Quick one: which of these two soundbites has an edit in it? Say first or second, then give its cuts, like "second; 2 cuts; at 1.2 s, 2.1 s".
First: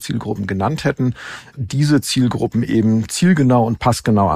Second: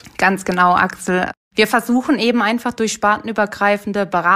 first; 1 cut; at 1.5 s